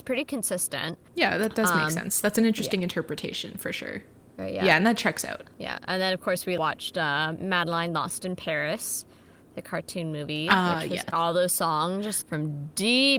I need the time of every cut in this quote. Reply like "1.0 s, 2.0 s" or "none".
11.1 s, 12.2 s